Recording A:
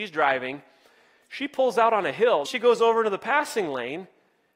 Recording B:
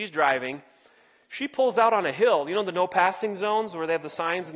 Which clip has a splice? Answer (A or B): A